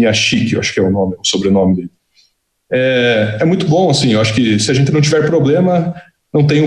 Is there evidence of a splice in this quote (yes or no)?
no